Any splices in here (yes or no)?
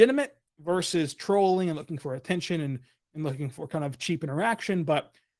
no